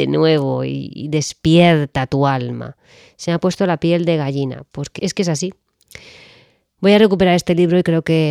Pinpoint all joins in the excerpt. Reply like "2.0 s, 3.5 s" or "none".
5.0 s